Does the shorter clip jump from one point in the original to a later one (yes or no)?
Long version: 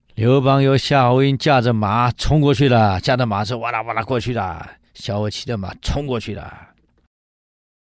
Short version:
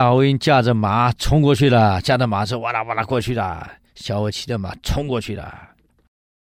no